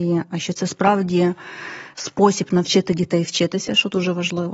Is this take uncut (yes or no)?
yes